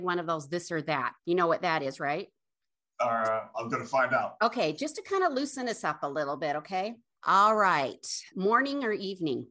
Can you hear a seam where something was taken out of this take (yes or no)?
yes